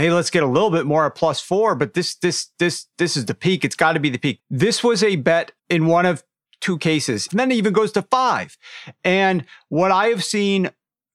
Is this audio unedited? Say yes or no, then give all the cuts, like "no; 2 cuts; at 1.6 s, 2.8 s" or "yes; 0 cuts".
no; 3 cuts; at 4.4 s, 5.6 s, 7.3 s